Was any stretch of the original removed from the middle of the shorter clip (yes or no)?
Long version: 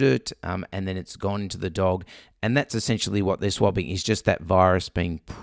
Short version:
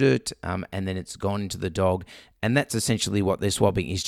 no